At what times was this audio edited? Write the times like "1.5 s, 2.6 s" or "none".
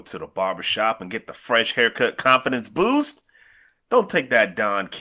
none